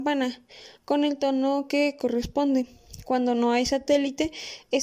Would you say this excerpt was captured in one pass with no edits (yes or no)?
yes